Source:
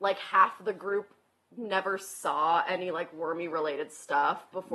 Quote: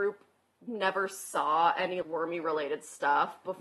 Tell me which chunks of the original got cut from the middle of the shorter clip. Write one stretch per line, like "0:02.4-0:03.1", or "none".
0:02.9-0:03.1